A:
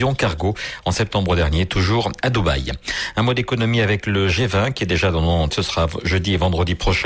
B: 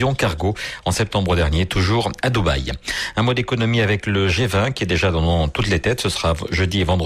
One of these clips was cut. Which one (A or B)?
A